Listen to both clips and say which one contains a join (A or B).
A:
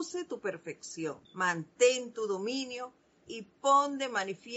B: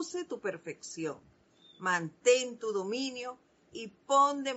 A